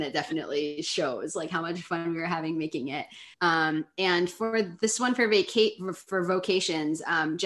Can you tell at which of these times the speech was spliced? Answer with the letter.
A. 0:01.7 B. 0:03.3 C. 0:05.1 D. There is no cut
B